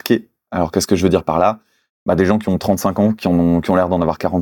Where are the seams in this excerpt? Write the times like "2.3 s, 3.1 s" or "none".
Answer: none